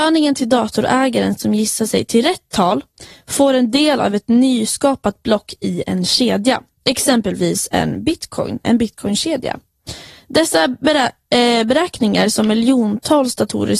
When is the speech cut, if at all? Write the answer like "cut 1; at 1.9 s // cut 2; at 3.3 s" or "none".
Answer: cut 1; at 8.6 s